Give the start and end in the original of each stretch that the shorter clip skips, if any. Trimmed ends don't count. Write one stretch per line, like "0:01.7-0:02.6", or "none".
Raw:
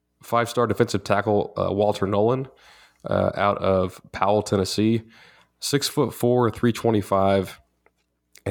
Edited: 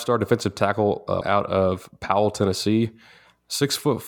0:01.7-0:03.3